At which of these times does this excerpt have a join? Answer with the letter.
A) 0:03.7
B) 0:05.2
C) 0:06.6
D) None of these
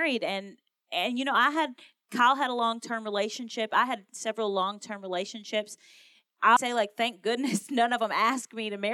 C